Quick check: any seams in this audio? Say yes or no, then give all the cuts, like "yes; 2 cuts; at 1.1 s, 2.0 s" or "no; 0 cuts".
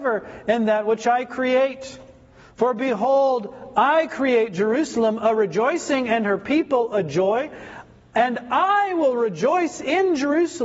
no; 0 cuts